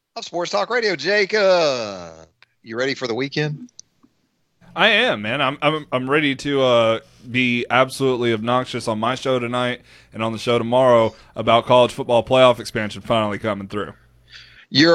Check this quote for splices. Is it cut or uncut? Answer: uncut